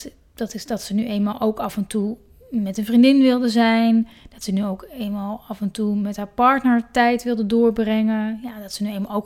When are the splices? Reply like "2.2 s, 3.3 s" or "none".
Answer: none